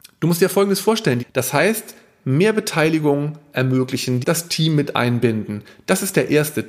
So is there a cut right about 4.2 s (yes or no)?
yes